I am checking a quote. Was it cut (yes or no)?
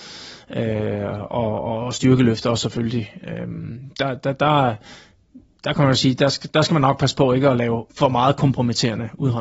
yes